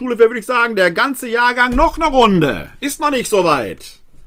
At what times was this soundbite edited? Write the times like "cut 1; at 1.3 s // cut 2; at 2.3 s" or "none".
none